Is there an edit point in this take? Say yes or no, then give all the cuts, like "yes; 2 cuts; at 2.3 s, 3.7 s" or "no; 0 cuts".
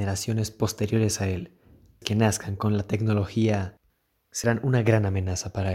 no; 0 cuts